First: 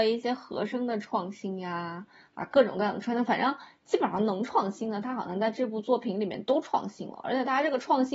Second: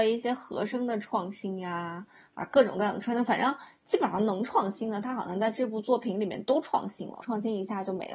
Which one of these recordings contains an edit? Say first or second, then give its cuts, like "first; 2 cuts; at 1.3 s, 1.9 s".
second; 1 cut; at 7.2 s